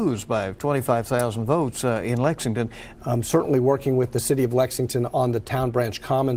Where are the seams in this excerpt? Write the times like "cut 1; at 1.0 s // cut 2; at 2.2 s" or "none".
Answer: cut 1; at 2.9 s